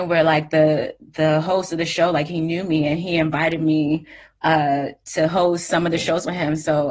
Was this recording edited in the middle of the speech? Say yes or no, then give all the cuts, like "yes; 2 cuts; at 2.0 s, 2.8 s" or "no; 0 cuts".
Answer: no; 0 cuts